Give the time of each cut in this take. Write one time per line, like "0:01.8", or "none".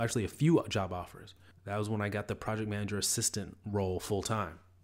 0:01.5